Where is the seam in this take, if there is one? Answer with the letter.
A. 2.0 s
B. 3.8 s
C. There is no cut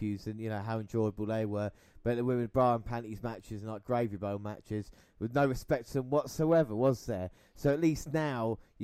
C